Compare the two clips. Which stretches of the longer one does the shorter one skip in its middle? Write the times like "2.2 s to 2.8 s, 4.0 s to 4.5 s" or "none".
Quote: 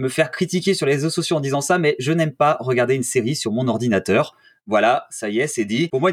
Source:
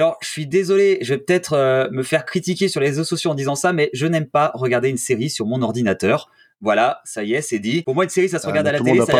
none